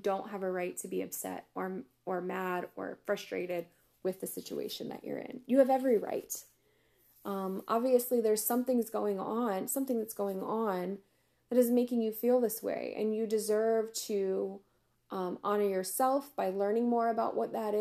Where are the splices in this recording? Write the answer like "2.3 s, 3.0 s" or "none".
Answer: none